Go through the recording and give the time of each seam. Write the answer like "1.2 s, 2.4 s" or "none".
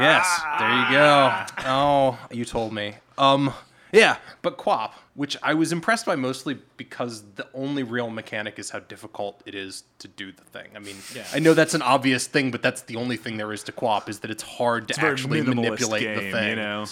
5.1 s